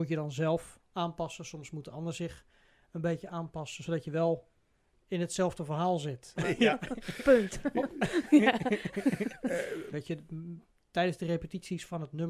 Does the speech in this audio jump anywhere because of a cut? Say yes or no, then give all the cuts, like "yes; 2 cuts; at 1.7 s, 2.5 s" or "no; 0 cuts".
yes; 2 cuts; at 6.4 s, 9.9 s